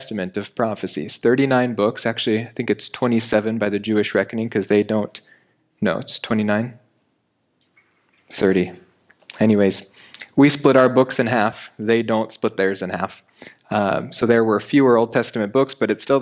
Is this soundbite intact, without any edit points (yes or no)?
yes